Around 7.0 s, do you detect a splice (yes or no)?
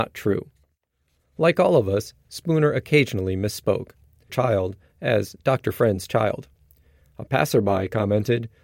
yes